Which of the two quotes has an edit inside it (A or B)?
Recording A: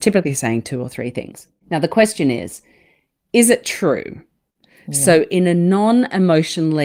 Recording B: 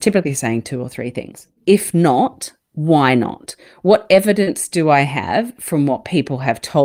B